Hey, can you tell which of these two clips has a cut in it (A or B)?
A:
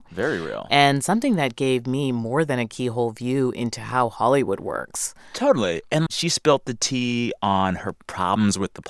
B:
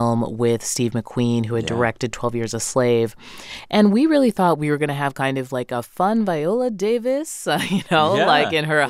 A